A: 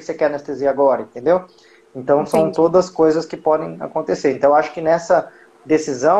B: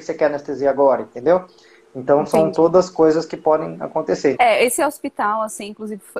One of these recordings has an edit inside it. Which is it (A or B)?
B